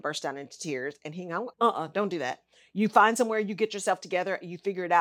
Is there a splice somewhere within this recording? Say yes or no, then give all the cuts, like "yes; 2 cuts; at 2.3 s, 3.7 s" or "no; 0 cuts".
yes; 1 cut; at 1.5 s